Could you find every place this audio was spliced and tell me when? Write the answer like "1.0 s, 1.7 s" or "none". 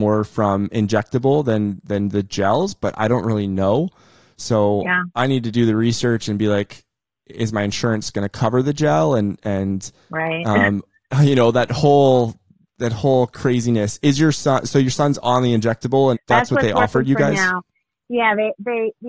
16.1 s